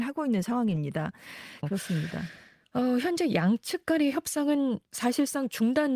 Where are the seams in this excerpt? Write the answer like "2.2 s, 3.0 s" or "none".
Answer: 1.6 s